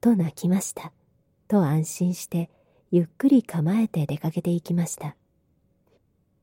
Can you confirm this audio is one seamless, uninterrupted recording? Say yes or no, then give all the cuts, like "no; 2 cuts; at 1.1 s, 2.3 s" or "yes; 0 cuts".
no; 1 cut; at 1.4 s